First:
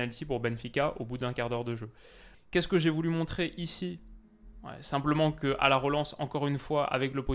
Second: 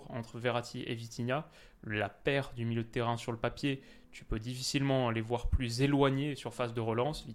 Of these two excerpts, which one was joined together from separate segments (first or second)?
first